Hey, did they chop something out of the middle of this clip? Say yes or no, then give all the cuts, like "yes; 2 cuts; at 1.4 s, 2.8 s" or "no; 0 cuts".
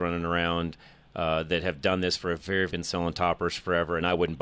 yes; 1 cut; at 2.7 s